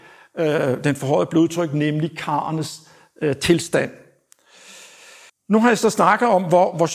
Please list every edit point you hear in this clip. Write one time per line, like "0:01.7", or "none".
0:05.3